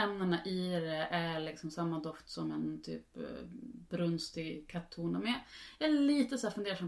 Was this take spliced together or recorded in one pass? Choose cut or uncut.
uncut